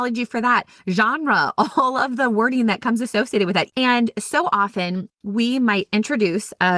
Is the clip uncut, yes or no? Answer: no